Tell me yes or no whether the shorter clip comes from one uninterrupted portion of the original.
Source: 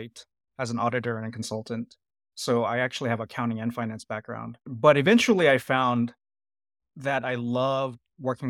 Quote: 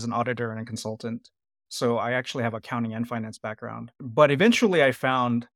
yes